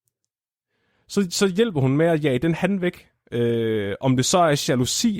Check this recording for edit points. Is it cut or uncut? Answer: uncut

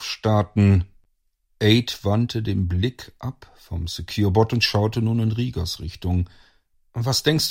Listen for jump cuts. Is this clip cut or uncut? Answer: uncut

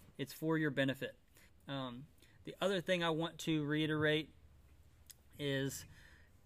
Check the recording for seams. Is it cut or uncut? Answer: cut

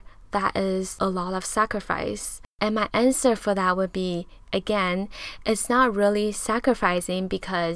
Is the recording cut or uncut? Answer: uncut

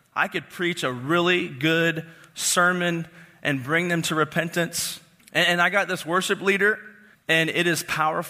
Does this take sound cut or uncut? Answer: cut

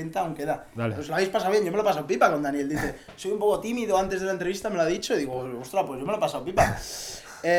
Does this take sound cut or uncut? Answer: uncut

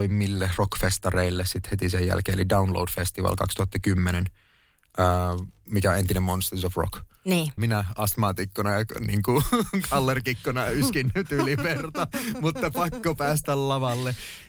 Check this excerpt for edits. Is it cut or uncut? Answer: cut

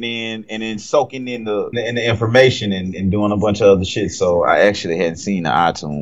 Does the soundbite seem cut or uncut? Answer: cut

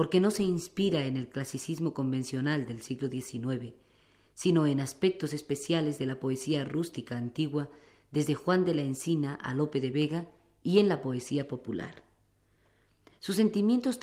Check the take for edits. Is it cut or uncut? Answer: uncut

